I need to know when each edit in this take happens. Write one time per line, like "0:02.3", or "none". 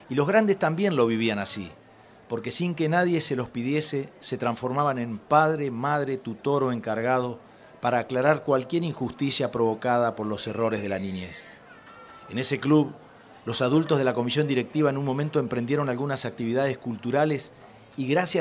none